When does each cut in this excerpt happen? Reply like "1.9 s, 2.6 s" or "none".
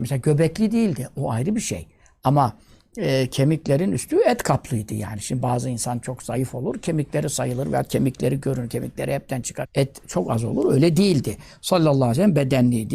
9.6 s